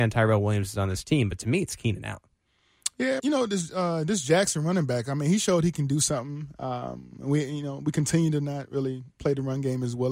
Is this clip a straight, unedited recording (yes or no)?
no